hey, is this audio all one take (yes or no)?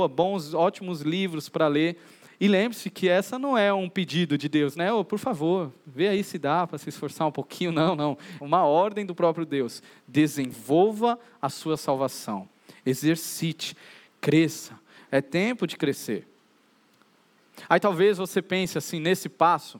no